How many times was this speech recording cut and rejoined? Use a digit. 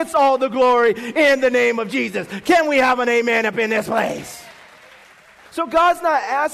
0